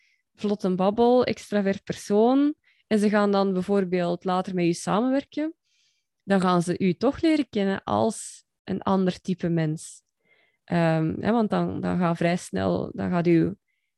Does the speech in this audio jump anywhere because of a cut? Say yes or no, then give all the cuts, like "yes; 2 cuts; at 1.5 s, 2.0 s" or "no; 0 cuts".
no; 0 cuts